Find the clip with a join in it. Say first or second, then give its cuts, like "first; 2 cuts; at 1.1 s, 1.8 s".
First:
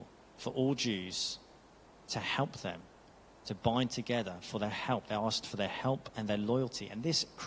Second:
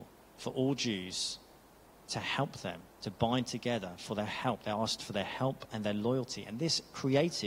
second; 1 cut; at 2.9 s